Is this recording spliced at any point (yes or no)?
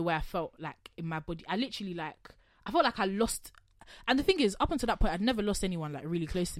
no